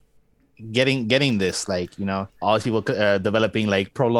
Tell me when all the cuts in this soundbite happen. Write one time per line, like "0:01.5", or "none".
0:02.4